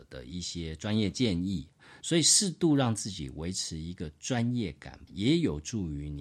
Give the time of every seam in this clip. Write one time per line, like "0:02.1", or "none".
0:02.0
0:05.1